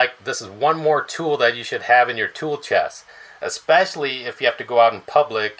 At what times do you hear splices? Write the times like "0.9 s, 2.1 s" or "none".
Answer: none